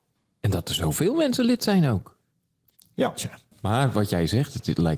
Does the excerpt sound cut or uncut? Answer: cut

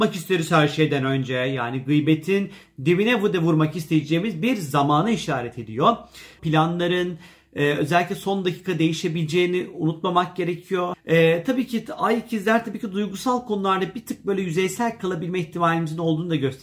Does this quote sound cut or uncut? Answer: cut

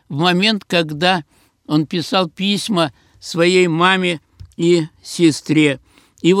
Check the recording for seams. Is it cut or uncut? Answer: uncut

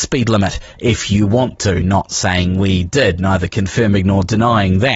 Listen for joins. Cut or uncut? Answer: uncut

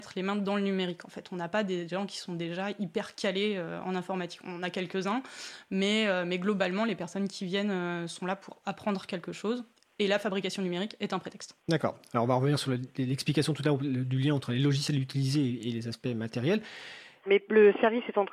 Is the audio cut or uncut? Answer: cut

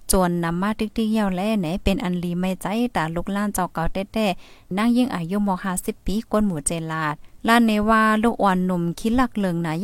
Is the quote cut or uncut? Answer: cut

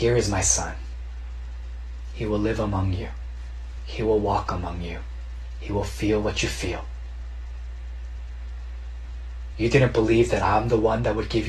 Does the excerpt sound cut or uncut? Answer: cut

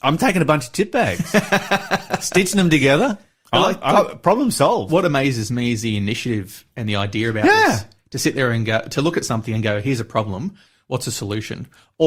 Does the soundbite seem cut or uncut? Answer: uncut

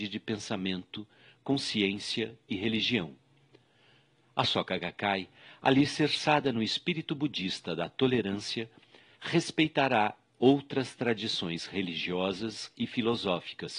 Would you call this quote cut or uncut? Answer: uncut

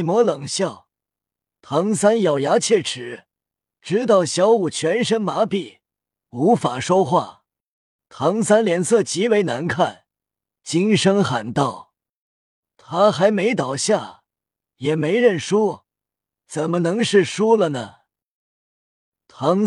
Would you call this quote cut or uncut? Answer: cut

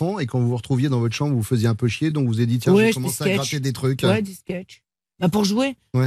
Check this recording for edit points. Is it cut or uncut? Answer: uncut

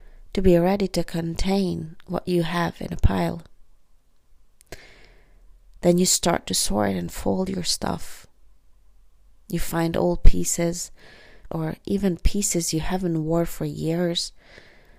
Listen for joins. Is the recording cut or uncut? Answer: cut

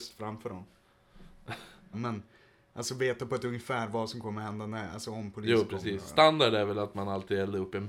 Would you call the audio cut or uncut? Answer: cut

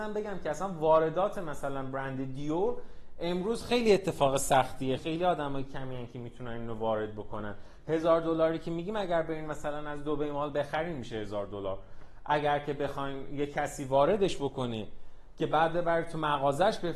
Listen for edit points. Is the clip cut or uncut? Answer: cut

